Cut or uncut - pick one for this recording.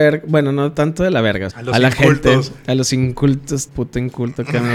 cut